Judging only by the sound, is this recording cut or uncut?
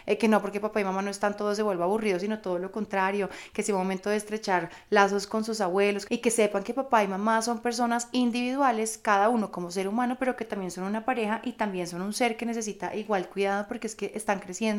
cut